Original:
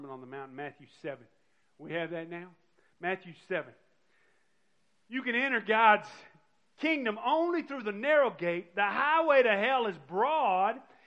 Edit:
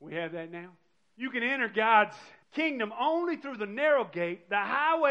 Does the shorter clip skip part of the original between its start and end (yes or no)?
yes